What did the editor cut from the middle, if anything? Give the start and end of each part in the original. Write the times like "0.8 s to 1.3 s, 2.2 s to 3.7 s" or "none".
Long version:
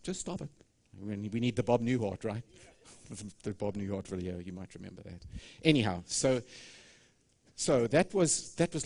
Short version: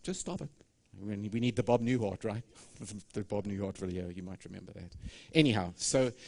2.5 s to 2.8 s